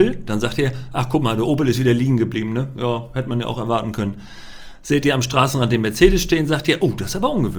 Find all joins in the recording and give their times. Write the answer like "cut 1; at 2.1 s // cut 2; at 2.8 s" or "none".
none